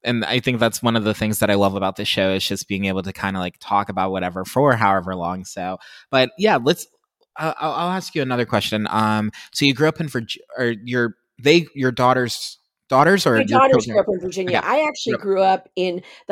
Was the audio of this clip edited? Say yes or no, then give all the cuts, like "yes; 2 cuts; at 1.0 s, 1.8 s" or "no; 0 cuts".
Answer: no; 0 cuts